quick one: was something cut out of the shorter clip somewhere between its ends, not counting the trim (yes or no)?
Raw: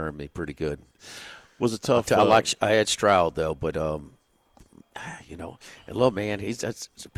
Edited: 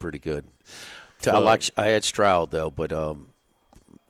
yes